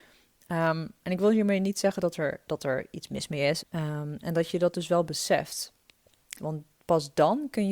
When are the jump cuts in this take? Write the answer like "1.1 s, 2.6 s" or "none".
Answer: 3.6 s, 6.4 s